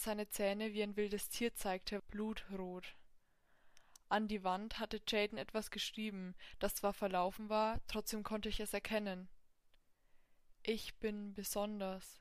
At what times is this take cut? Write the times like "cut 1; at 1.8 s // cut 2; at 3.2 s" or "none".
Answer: cut 1; at 2.0 s